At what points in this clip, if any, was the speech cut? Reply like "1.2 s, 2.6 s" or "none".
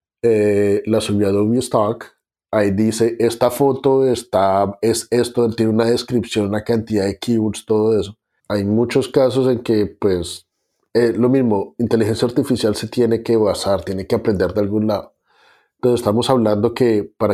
8.4 s